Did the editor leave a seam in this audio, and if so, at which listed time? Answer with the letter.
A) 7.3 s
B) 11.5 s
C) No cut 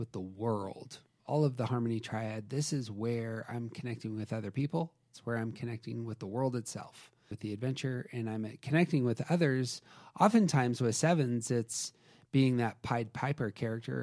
A